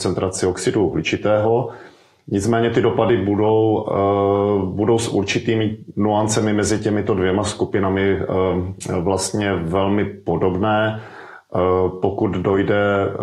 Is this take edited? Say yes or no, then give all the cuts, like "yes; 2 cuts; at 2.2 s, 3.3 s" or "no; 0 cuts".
no; 0 cuts